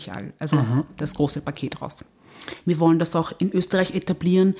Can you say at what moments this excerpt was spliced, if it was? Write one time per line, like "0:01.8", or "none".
0:02.6